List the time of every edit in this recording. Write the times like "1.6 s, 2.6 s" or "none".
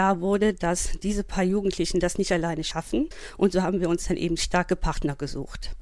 none

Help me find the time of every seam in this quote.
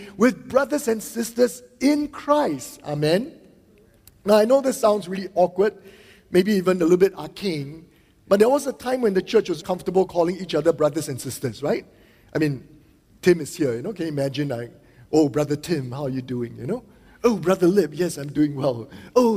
9.6 s

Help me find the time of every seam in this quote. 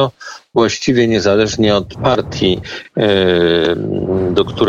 none

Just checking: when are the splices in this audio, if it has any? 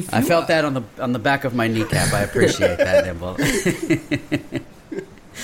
none

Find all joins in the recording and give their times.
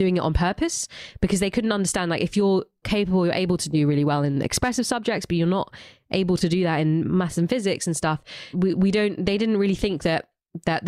2.8 s, 8.5 s

